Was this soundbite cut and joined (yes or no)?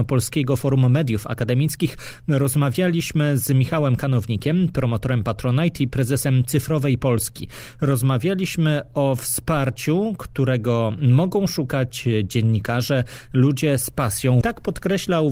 yes